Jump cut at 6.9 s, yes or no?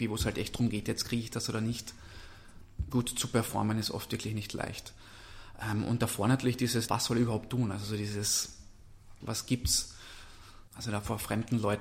yes